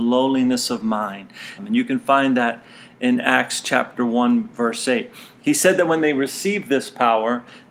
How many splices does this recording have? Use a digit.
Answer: 1